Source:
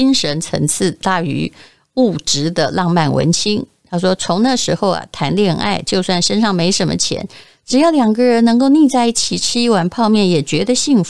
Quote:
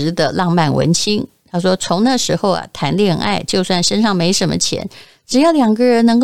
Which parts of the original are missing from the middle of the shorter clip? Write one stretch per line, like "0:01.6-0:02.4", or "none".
none